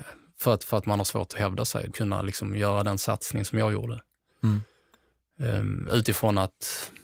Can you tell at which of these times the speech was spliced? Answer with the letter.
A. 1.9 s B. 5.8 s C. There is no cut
A